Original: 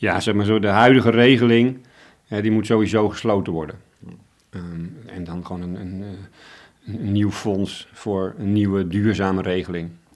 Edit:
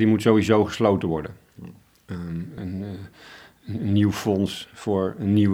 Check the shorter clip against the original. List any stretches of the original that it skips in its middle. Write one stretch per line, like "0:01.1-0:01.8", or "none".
0:05.0-0:05.8